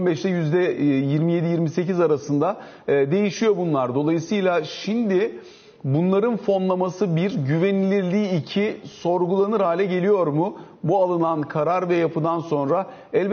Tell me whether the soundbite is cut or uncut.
uncut